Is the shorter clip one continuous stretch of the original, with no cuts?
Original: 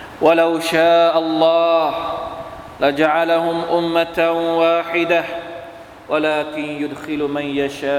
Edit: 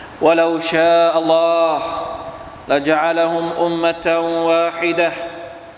no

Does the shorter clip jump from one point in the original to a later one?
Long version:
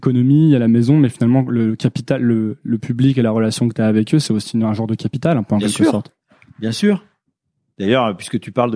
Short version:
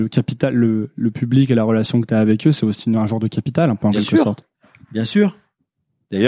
no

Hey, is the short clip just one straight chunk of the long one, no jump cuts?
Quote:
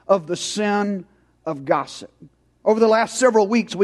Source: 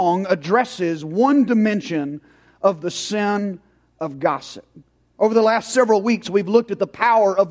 yes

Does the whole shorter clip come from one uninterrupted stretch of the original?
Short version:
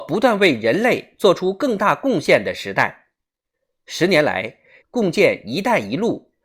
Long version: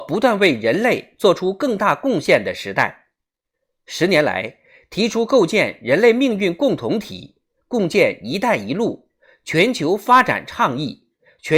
no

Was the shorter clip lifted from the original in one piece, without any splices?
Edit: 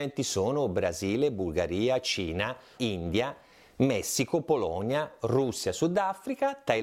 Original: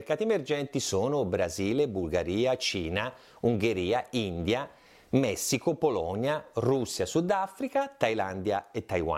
no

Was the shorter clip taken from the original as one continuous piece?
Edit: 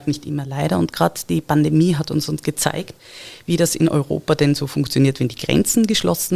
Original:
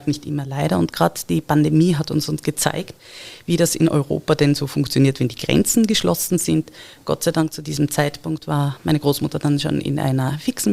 yes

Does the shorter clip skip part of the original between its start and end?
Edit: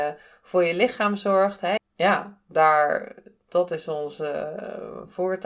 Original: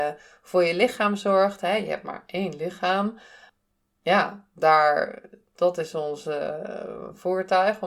yes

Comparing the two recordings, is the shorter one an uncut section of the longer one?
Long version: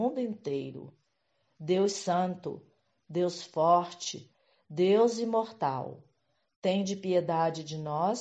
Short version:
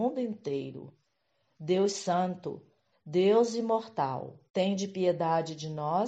no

